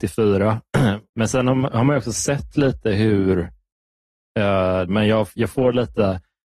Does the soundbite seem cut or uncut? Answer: cut